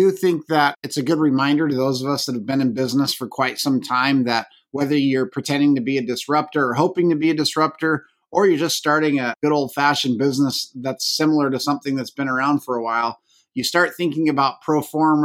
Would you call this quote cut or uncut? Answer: uncut